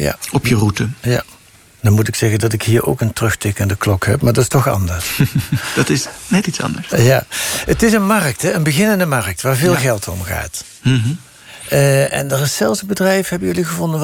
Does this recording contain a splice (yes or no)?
no